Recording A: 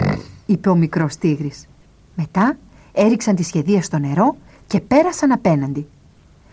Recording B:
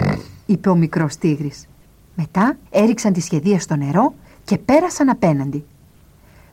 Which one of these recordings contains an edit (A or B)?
B